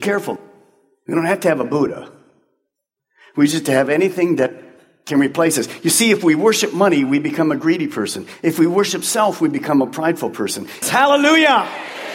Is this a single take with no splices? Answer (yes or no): no